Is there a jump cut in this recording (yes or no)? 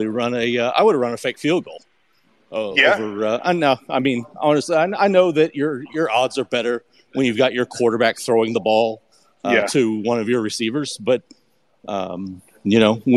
no